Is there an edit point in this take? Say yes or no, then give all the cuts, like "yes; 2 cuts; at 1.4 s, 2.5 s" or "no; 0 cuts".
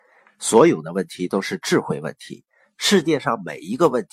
yes; 1 cut; at 2.6 s